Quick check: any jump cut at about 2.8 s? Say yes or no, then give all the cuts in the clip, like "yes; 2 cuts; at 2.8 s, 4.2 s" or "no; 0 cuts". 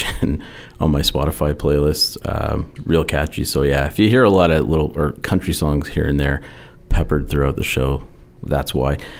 yes; 1 cut; at 2.8 s